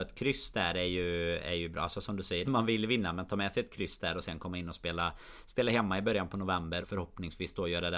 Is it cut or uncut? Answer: cut